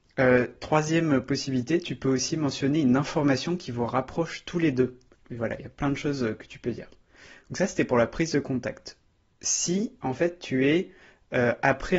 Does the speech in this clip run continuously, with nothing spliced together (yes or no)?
no